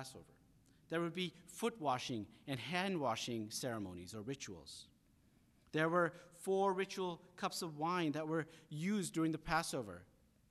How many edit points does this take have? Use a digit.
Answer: 0